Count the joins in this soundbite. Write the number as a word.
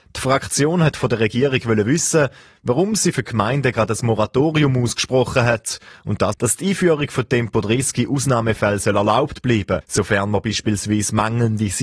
two